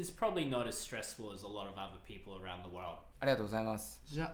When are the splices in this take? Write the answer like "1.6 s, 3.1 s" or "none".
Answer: 3.1 s